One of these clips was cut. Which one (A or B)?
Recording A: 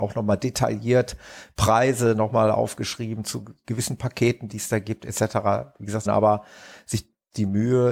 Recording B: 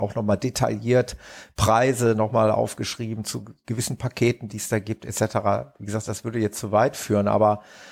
A